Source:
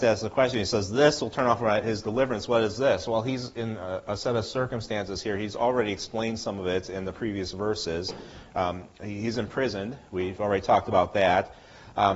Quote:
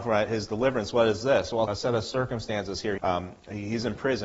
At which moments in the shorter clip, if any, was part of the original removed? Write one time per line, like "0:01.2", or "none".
0:01.7
0:03.0